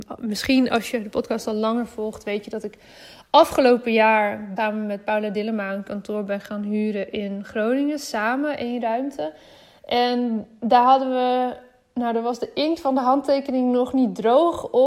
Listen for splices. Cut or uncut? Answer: cut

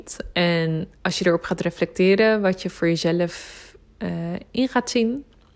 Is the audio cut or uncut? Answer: cut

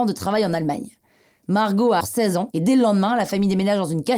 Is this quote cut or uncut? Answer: cut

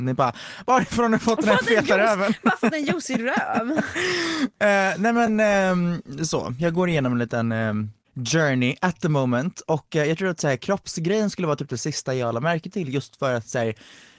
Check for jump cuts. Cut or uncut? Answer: uncut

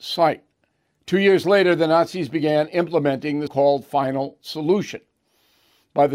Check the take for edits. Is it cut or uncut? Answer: cut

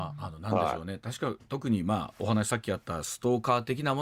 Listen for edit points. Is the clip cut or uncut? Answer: uncut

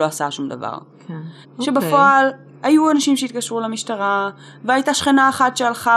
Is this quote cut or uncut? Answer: cut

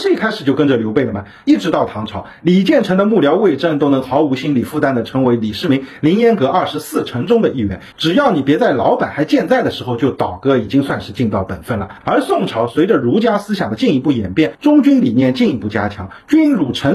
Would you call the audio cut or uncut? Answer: cut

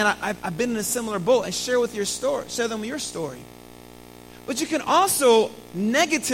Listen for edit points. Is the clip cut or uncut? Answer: uncut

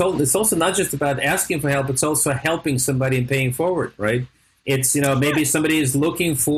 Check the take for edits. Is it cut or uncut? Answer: uncut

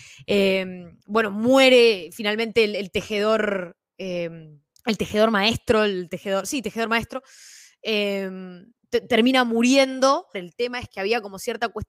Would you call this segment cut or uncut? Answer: cut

